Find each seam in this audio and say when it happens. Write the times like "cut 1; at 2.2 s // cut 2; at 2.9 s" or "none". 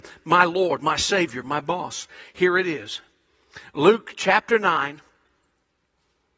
cut 1; at 1.4 s